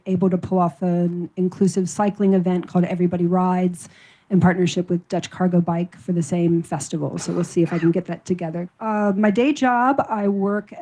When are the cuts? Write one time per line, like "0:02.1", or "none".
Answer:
0:08.7